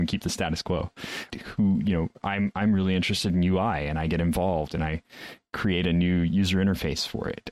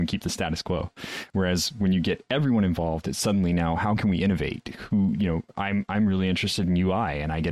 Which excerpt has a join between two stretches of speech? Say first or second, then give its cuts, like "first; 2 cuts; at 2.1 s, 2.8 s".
first; 1 cut; at 1.3 s